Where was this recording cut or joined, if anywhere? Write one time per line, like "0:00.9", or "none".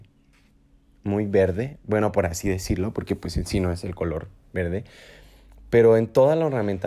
none